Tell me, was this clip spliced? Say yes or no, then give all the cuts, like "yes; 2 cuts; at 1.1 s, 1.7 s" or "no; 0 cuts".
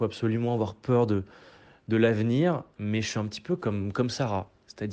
no; 0 cuts